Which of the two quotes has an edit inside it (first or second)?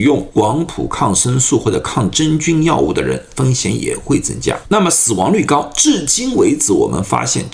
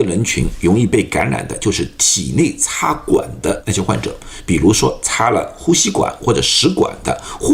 first